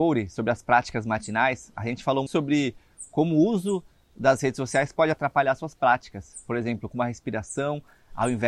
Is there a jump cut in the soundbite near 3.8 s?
no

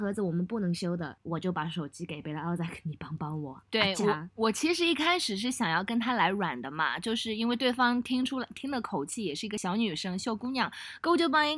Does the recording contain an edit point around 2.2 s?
yes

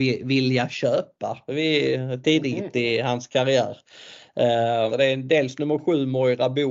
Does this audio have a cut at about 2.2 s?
yes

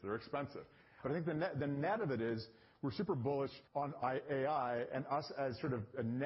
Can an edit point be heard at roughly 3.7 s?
yes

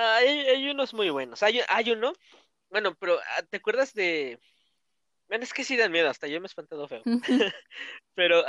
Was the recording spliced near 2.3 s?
no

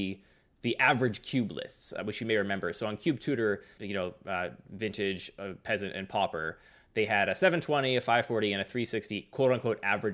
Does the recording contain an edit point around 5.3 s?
no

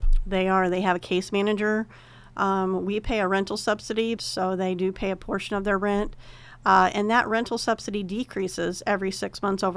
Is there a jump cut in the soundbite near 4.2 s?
yes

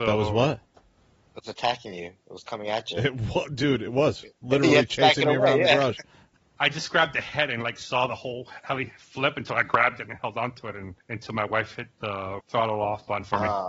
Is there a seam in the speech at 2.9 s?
no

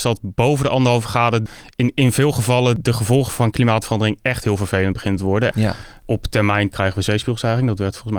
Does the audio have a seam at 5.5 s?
yes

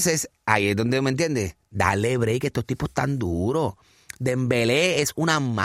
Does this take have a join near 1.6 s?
no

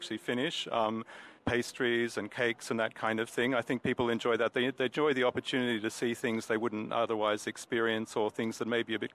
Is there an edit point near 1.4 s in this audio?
yes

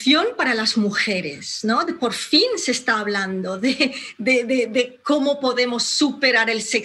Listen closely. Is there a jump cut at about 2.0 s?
no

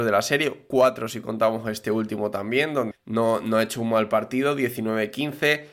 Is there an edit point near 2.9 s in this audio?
yes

